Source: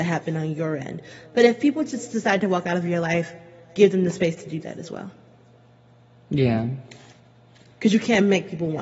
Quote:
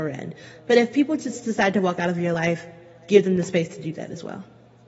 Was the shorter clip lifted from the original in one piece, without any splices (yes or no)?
yes